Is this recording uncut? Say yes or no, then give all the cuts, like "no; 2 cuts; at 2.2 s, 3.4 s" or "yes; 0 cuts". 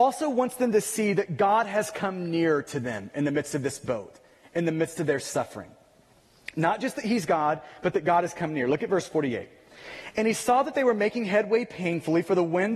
yes; 0 cuts